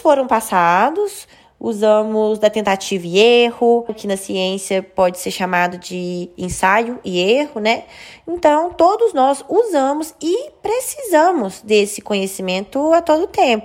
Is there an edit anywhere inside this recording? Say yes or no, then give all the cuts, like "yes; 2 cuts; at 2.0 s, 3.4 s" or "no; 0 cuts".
yes; 1 cut; at 3.9 s